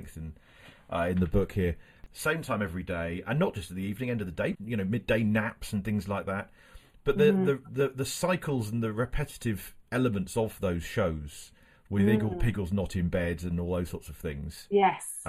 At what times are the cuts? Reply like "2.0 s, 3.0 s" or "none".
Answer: 4.5 s